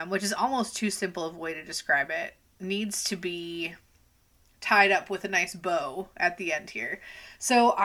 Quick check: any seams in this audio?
no; 0 cuts

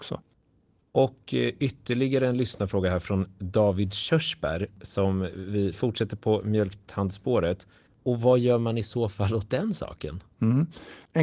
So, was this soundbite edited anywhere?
yes; 1 cut; at 7.9 s

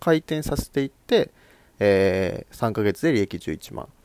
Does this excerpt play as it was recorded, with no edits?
yes; 0 cuts

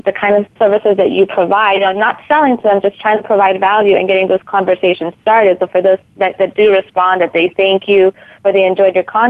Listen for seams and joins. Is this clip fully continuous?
yes; 0 cuts

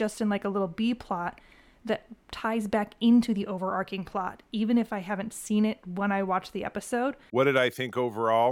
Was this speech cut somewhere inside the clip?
yes; 1 cut; at 7.3 s

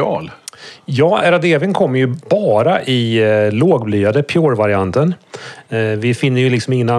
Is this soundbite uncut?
yes; 0 cuts

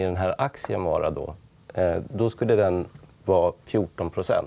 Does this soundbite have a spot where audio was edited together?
no; 0 cuts

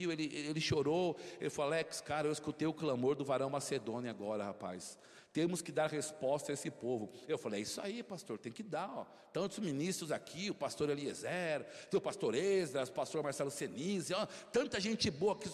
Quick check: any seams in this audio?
no; 0 cuts

